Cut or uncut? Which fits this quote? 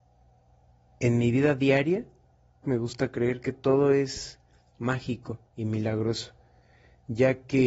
cut